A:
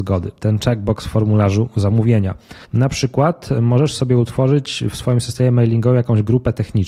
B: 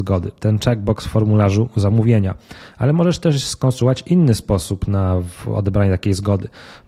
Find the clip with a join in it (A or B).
A